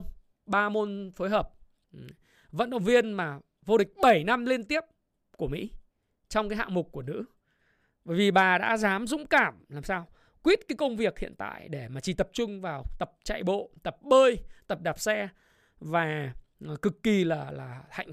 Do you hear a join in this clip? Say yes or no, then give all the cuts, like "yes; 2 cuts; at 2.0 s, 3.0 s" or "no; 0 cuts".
no; 0 cuts